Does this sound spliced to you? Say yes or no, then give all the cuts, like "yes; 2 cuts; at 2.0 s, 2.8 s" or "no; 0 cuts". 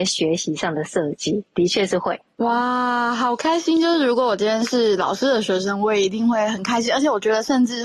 no; 0 cuts